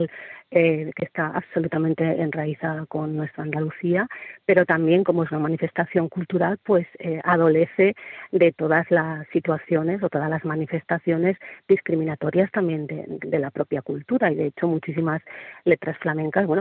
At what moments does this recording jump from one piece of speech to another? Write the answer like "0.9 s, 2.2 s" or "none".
9.3 s